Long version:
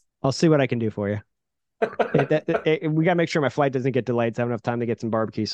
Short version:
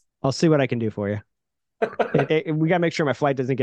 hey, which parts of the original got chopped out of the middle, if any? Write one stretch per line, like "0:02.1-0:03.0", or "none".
0:02.3-0:02.6

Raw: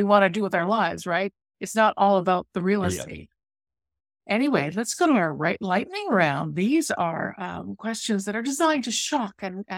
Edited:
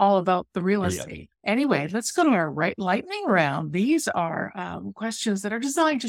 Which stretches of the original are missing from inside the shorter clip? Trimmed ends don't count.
0:03.3-0:04.2

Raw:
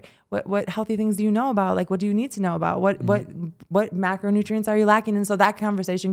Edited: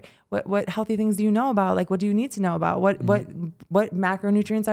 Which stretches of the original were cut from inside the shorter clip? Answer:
none

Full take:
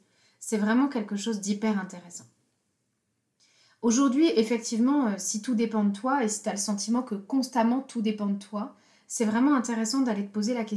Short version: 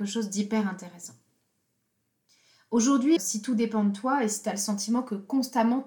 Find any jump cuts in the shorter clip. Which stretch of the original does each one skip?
0:04.3-0:05.2

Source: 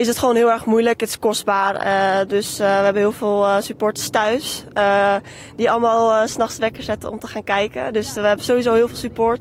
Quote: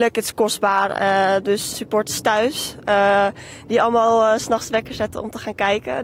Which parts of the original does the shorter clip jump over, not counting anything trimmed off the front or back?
0:02.6-0:03.6

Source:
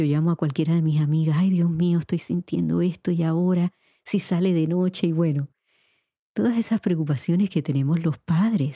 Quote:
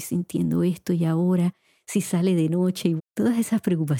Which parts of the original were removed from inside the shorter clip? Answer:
0:05.1-0:06.2

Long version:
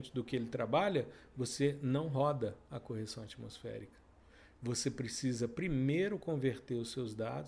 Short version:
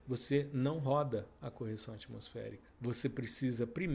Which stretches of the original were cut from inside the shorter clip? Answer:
0:04.0-0:04.5

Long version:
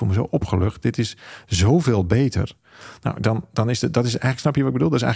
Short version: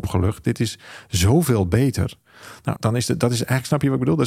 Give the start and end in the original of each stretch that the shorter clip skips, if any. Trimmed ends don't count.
0:03.1-0:03.5

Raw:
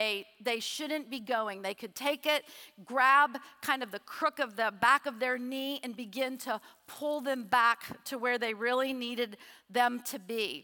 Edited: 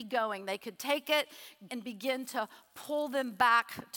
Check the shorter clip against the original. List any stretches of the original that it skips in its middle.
0:02.8-0:05.8

